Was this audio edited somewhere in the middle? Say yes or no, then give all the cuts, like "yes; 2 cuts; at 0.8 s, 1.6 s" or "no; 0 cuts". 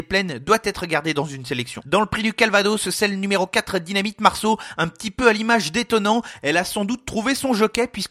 yes; 1 cut; at 1.8 s